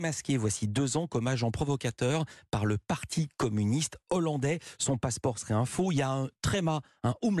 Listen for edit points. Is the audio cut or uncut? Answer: uncut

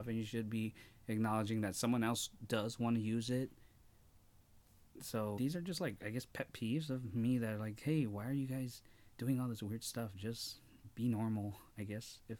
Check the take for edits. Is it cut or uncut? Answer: cut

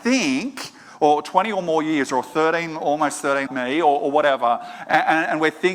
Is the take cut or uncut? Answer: cut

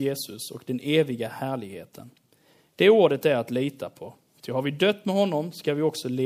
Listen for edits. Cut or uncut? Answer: uncut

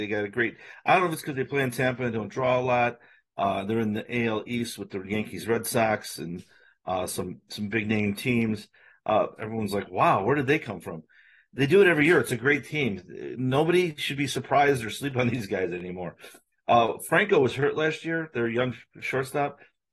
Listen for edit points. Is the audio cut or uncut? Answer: cut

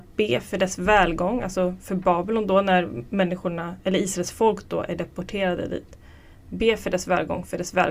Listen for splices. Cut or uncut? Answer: uncut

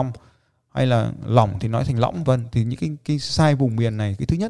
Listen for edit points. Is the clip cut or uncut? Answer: cut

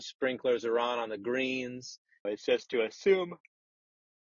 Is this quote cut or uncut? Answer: cut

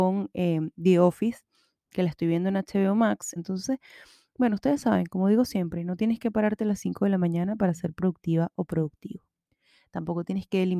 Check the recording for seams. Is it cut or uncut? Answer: cut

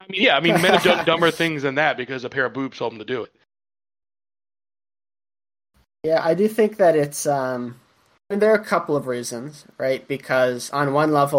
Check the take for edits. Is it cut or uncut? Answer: uncut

